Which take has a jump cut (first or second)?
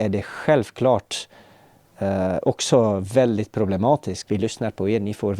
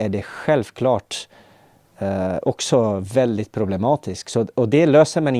first